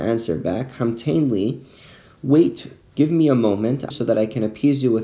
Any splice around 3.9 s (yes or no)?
yes